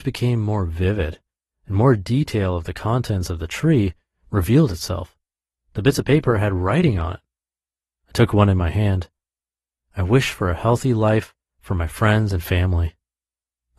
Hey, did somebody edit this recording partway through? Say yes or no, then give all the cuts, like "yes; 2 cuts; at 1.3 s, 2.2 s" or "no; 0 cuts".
no; 0 cuts